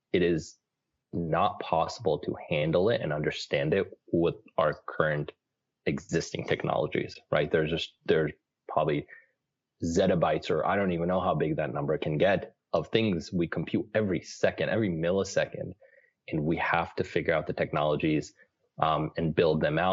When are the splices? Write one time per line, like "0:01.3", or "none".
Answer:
none